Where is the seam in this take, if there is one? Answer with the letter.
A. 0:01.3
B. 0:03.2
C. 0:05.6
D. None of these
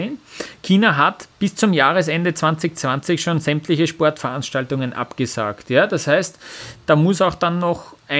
A